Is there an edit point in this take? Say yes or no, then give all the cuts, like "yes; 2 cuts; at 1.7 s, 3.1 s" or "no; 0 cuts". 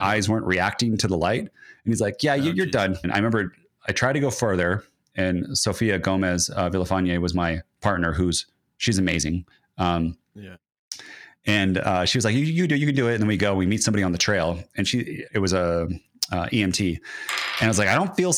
yes; 2 cuts; at 3.0 s, 15.3 s